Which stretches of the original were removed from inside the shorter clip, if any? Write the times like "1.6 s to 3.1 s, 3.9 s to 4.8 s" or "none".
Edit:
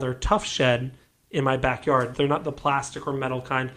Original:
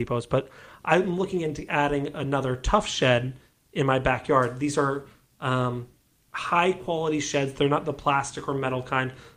4.6 s to 7.5 s